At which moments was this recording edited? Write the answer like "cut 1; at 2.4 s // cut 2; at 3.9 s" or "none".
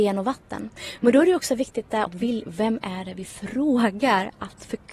cut 1; at 2.1 s